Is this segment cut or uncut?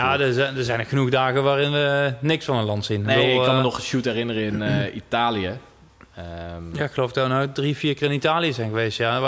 uncut